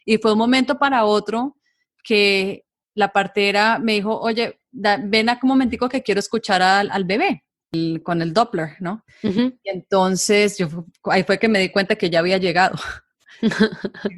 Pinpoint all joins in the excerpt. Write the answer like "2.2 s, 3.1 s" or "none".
none

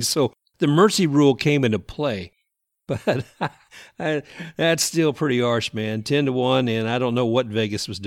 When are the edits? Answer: none

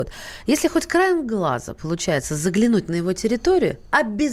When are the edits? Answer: none

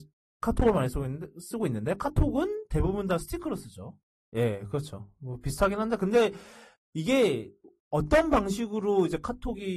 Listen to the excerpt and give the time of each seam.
4.2 s

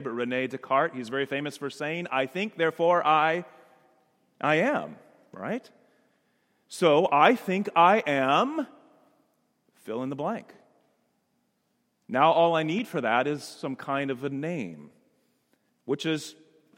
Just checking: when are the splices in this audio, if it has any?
none

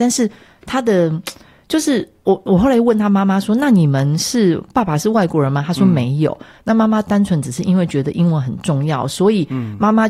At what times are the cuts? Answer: none

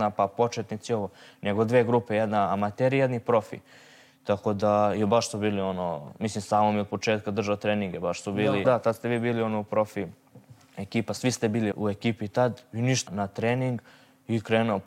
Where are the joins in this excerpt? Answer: 8.6 s, 11.7 s, 13.1 s

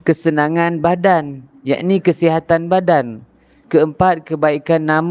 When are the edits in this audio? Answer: 3.6 s

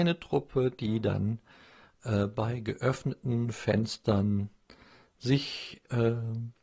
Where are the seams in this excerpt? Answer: none

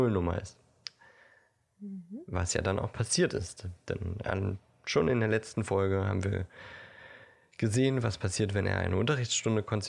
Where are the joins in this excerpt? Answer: none

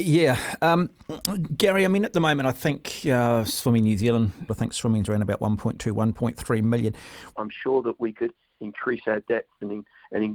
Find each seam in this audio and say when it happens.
4.5 s, 7.3 s

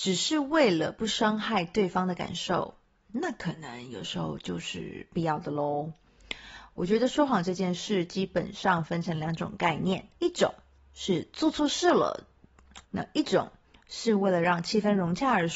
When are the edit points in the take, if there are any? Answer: 10.2 s, 12.8 s

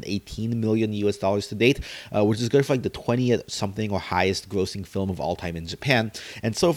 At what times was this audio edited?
none

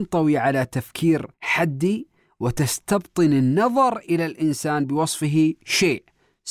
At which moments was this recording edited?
1.3 s

